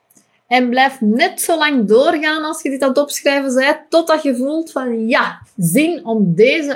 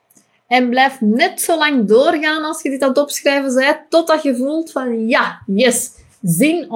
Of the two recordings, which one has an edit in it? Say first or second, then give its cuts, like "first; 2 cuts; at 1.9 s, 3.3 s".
first; 1 cut; at 5.4 s